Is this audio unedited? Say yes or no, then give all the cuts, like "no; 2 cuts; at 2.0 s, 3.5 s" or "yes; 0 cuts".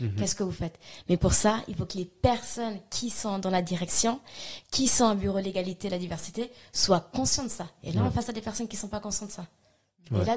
yes; 0 cuts